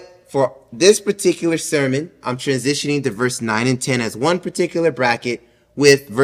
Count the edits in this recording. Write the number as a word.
zero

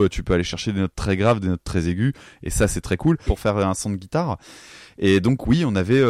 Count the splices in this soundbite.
one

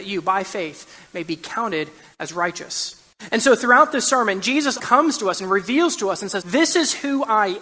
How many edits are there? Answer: two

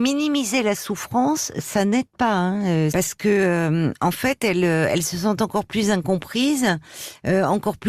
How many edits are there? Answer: one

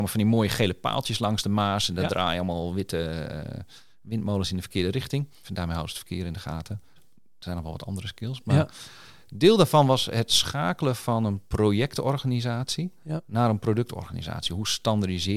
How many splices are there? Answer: two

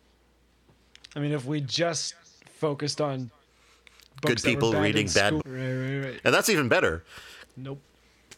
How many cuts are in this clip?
two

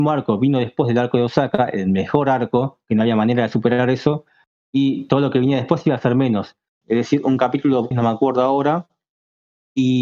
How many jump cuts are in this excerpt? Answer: two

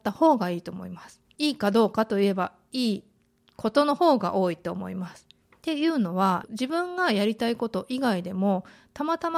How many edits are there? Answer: three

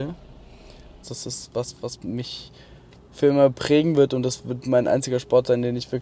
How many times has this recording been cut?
one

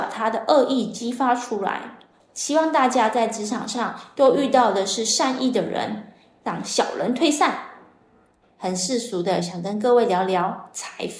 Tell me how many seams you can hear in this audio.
one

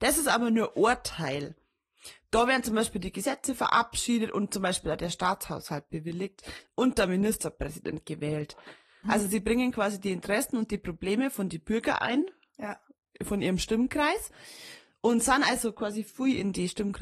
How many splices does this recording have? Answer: one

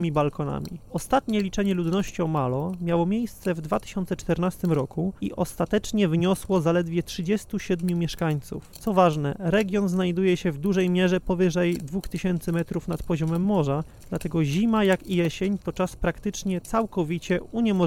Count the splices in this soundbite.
zero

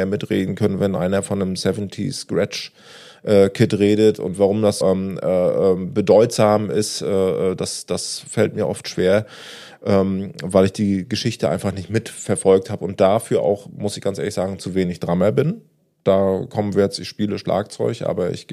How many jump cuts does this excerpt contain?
one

